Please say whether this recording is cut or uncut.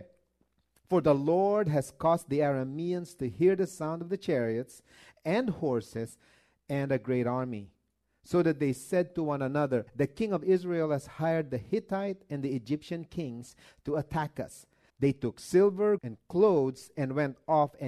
cut